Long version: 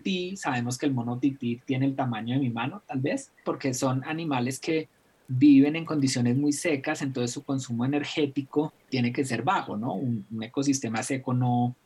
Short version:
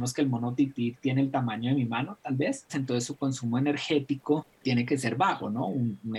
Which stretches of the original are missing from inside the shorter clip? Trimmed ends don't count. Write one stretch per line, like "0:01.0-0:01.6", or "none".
0:03.3-0:07.0